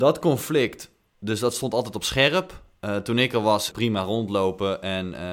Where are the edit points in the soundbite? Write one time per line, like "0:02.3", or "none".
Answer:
0:03.7